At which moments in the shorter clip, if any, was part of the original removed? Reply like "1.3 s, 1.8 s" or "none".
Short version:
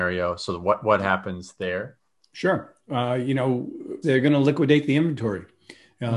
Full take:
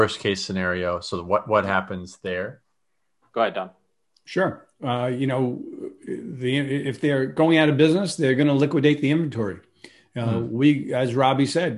2.2 s, 4.0 s